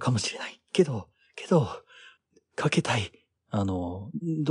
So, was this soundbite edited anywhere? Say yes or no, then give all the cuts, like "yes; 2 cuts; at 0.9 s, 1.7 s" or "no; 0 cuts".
yes; 1 cut; at 3.4 s